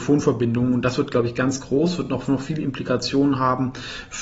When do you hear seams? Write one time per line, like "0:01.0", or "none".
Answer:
none